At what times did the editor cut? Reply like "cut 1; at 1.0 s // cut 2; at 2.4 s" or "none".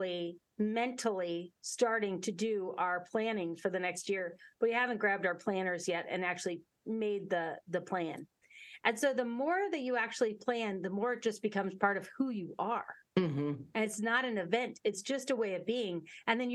none